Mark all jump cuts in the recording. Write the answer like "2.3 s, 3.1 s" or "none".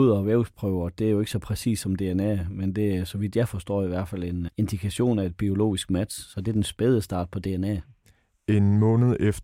4.5 s